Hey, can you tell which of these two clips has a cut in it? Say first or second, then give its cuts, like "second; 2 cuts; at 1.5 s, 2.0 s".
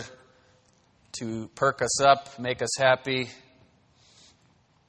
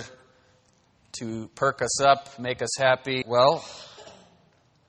second; 1 cut; at 3.2 s